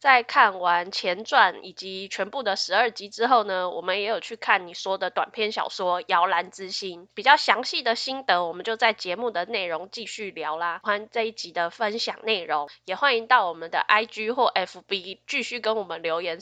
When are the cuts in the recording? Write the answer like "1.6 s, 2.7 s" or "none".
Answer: 10.8 s